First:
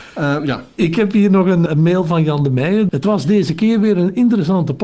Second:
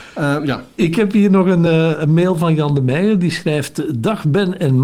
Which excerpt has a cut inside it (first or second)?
first